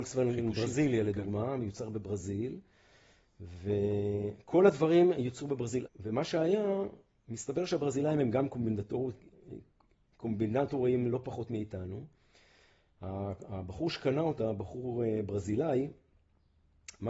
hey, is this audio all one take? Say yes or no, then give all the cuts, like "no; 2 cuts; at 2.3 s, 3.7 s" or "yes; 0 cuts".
no; 1 cut; at 5.8 s